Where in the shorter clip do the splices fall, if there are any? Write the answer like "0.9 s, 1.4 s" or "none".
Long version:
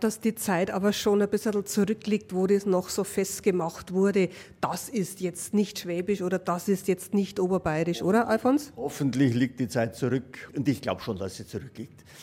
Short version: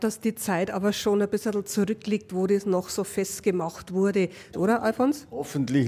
4.5 s

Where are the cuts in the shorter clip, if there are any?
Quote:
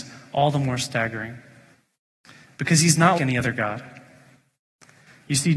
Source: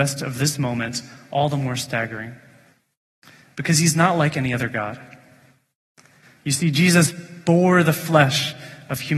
3.2 s

